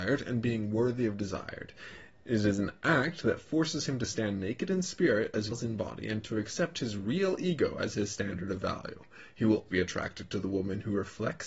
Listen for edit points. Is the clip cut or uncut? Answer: cut